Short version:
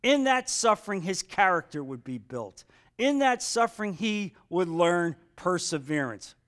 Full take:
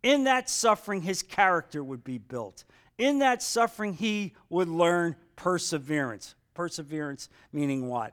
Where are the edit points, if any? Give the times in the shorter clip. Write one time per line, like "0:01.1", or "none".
none